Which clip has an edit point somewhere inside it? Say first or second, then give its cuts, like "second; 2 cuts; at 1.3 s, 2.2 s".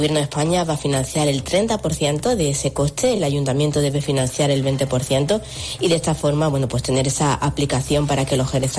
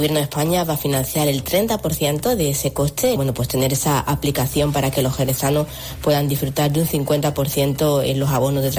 second; 1 cut; at 3.2 s